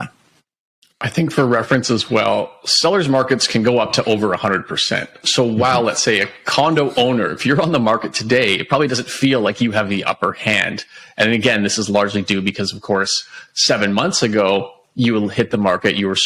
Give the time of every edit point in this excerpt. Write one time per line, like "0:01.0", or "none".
none